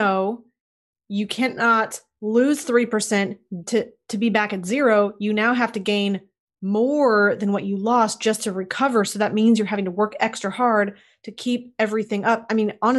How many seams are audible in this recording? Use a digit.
1